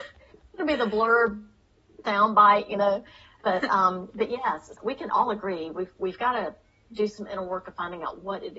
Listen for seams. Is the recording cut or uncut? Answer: cut